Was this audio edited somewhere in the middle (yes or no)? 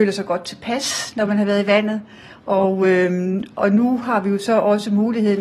no